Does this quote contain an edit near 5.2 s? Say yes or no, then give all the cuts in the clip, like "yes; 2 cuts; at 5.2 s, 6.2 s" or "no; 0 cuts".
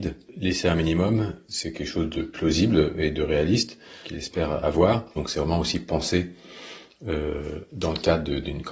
yes; 1 cut; at 5.2 s